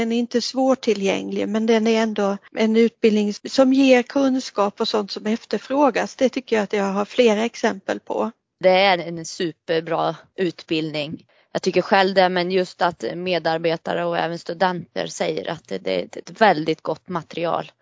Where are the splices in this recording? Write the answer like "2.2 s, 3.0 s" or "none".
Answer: 9.0 s